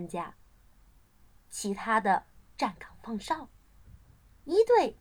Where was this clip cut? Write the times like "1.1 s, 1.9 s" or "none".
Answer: 1.3 s

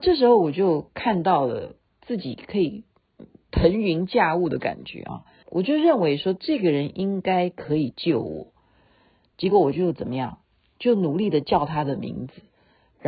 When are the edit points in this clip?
5.4 s

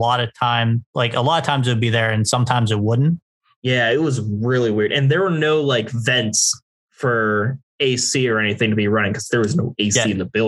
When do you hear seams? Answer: none

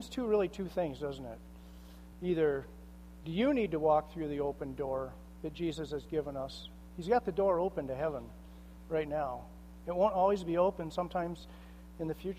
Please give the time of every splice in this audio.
none

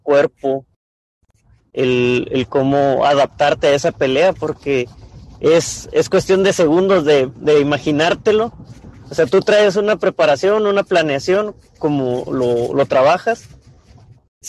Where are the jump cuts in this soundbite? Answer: none

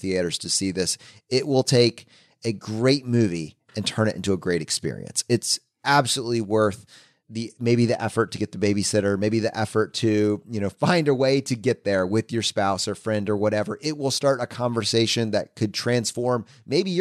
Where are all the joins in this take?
none

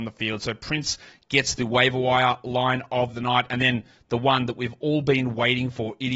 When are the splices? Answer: none

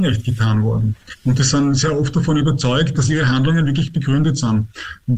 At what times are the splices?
none

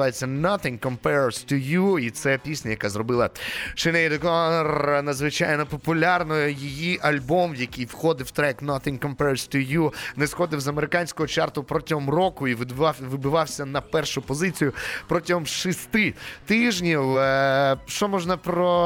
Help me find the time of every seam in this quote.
none

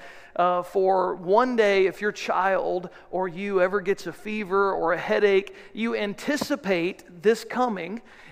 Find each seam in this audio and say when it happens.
none

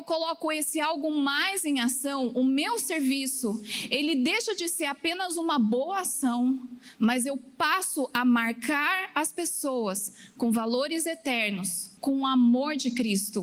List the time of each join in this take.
12.0 s

